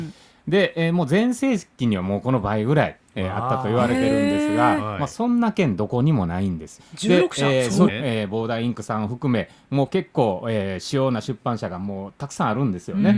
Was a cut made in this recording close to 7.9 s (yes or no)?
yes